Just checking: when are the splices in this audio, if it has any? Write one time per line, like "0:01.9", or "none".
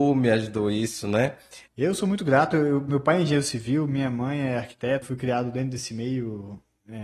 0:01.7
0:05.0